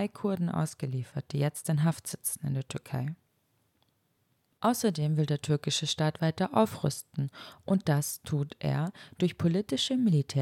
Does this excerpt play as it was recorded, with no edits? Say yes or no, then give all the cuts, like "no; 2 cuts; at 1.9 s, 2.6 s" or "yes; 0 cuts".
yes; 0 cuts